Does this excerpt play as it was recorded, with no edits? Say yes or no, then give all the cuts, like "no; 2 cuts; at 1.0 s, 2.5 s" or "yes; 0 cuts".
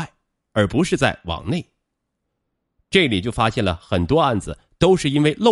yes; 0 cuts